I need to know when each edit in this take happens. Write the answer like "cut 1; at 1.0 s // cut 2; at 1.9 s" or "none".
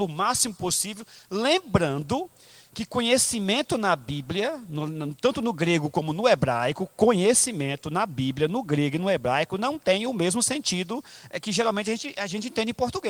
none